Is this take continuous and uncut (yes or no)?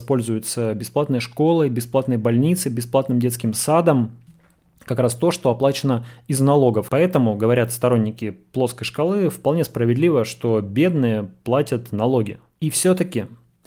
no